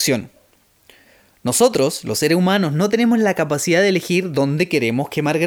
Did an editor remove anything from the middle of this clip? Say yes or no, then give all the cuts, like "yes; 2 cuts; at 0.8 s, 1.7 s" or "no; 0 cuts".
no; 0 cuts